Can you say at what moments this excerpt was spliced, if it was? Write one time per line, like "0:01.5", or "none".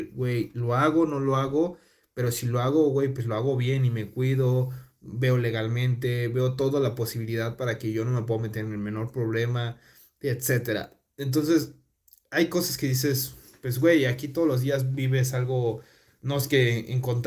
none